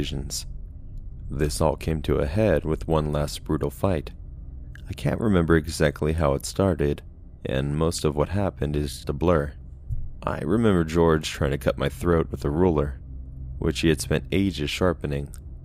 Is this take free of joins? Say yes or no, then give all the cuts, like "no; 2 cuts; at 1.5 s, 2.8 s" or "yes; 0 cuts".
no; 2 cuts; at 9.0 s, 10.2 s